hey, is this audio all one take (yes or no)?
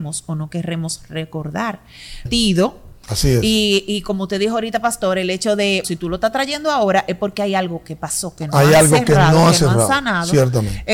no